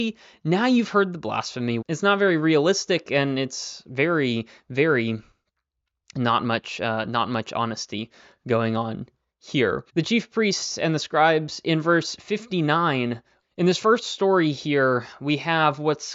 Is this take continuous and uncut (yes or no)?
no